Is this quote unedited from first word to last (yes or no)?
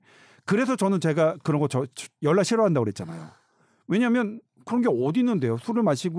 yes